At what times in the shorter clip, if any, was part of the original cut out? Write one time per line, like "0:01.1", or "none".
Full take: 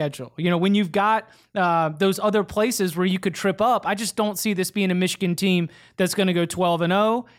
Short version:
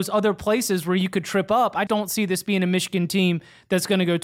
0:01.9